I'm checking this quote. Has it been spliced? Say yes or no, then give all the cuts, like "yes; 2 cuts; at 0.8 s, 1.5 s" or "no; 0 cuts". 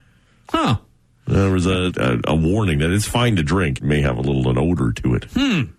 yes; 2 cuts; at 1.9 s, 3.8 s